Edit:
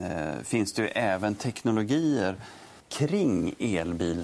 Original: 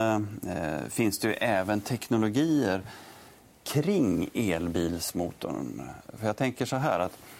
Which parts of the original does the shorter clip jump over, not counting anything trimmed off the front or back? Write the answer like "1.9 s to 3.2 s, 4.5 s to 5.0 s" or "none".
3.3 s to 3.6 s

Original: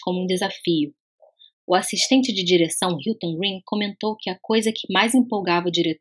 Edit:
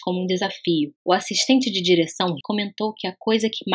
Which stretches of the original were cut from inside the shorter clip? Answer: 1.0 s to 1.6 s, 3.0 s to 3.6 s

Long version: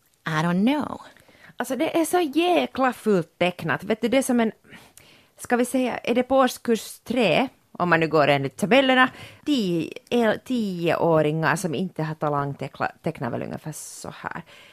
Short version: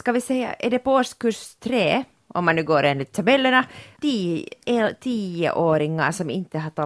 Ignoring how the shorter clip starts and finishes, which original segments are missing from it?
none

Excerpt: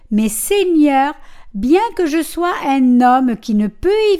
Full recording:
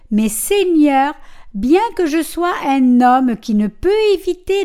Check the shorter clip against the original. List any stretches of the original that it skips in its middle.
none

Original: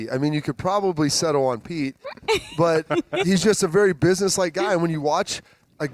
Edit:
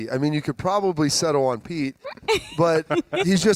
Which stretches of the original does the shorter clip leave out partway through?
none

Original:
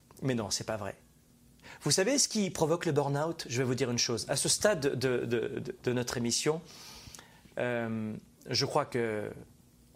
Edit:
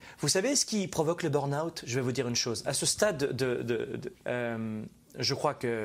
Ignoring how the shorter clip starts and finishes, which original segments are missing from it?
5.8 s to 7.4 s

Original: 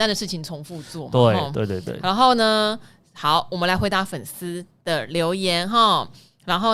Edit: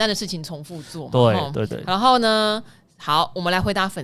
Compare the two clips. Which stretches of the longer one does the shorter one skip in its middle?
1.7 s to 1.8 s

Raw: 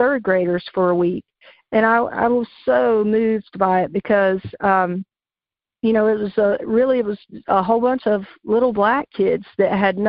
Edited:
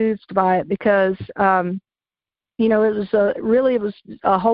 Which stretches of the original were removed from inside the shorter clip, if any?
none

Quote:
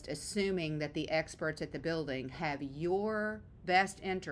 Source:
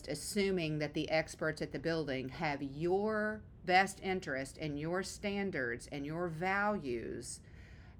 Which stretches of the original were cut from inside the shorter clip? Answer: none

